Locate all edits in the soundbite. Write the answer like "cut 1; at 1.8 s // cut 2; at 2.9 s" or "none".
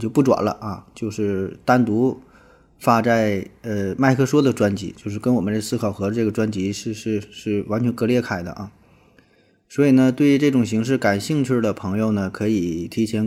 none